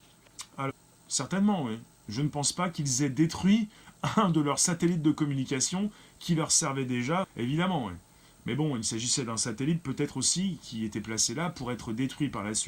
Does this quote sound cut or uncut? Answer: cut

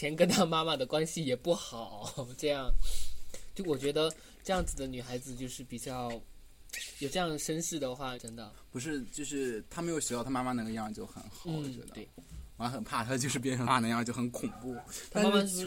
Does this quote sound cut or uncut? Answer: cut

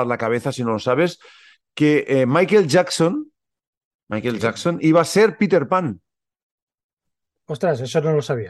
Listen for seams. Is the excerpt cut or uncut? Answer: uncut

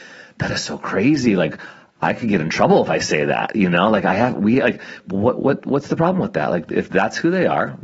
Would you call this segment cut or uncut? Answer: cut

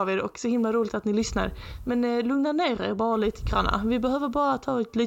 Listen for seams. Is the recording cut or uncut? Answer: uncut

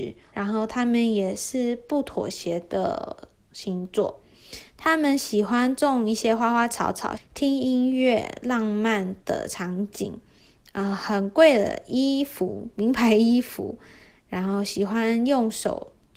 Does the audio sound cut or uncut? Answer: cut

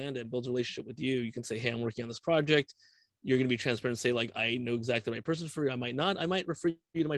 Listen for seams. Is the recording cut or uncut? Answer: uncut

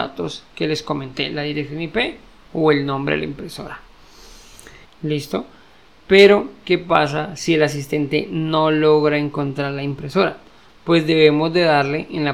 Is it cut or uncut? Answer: cut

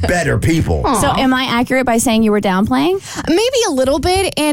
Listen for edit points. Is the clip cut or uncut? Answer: uncut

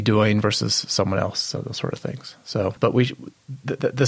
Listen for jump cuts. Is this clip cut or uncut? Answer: uncut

